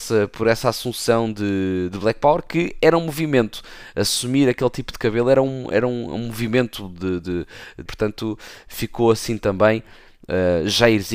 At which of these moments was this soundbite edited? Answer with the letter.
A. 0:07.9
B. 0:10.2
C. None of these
A